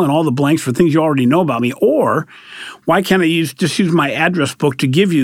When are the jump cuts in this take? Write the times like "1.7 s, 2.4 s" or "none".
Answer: none